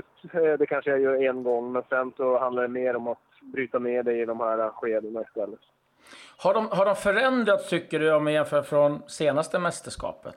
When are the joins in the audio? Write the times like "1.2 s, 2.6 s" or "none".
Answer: none